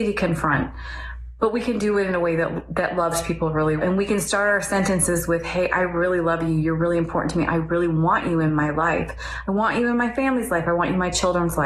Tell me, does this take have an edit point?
yes; 1 cut; at 3.8 s

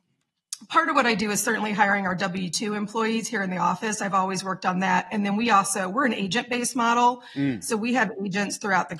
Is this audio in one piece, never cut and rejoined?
yes; 0 cuts

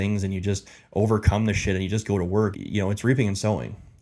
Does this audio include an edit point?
yes; 1 cut; at 2.5 s

